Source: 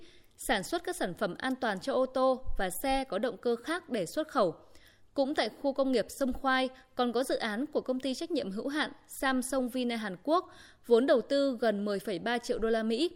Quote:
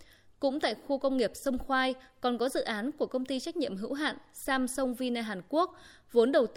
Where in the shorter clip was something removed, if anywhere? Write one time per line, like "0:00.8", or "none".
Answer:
none

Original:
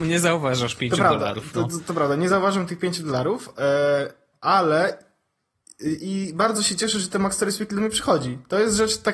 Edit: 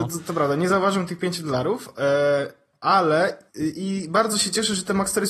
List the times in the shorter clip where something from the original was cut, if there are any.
0:03.5

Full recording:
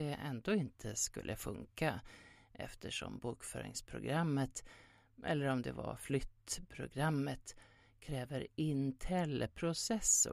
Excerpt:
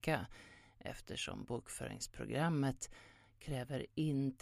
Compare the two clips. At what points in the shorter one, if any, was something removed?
0:03.2

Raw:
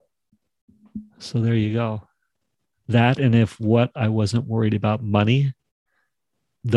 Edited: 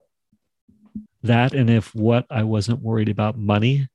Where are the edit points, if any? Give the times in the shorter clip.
0:01.1

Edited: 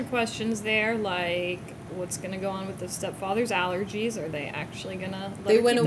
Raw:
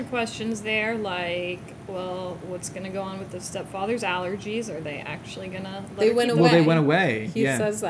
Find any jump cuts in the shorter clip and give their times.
0:01.9

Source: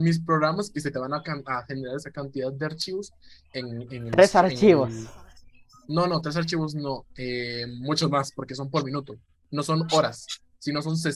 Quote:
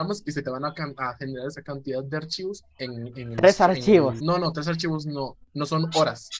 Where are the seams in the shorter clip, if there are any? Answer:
0:02.7
0:04.2
0:05.4

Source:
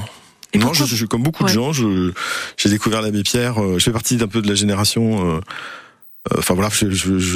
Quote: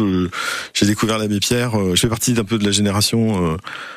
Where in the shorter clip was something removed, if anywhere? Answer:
none

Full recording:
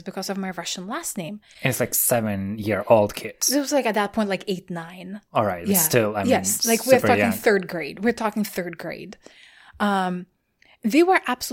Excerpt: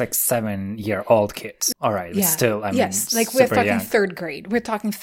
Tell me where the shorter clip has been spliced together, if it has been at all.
0:01.7

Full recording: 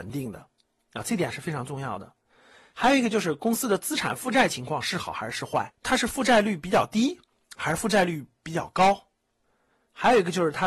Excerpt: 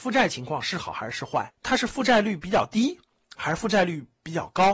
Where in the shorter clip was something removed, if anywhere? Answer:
none

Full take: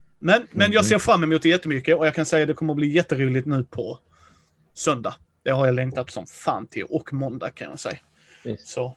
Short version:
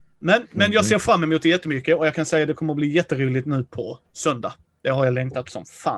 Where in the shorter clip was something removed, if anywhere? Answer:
0:04.0

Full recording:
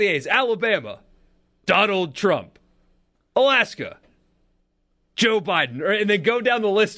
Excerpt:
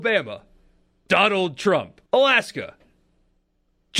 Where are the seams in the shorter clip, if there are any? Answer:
0:02.1

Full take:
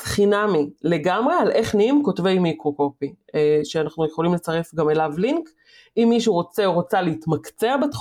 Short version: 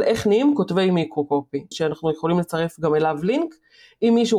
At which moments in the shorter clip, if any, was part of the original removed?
0:01.7

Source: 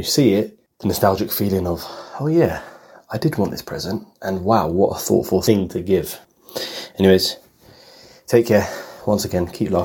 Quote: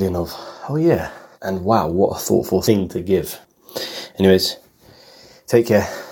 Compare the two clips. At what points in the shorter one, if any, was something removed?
0:01.3

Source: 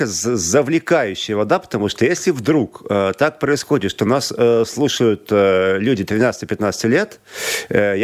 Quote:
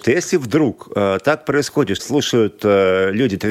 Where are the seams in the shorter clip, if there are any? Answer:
0:02.0

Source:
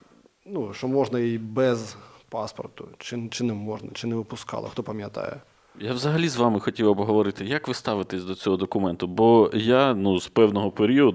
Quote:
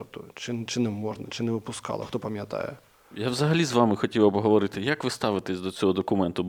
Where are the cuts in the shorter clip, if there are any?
none

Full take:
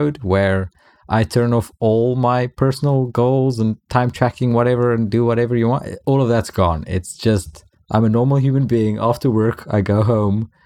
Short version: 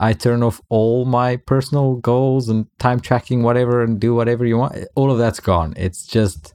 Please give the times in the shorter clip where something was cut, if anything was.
none

